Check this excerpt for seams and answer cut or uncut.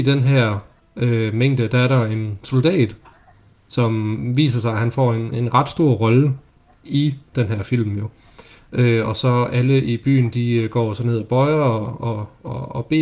cut